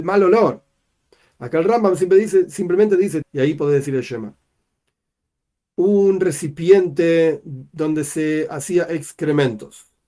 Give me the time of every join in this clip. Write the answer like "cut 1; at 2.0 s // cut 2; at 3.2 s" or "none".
cut 1; at 3.2 s